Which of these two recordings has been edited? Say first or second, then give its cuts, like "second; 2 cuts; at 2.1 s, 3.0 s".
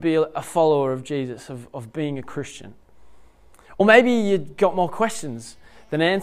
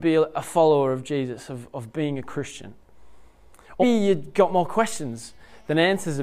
second; 1 cut; at 3.8 s